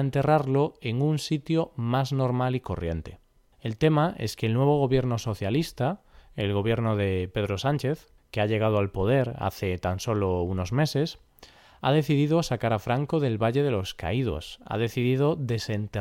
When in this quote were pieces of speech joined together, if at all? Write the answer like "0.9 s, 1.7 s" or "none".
3.5 s